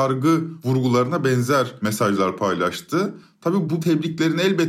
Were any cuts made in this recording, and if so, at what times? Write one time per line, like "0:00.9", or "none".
none